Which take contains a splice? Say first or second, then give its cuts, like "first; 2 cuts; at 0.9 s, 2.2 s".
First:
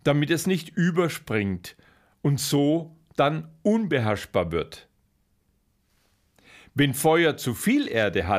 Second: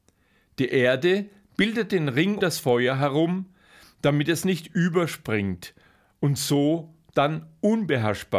second; 1 cut; at 2.4 s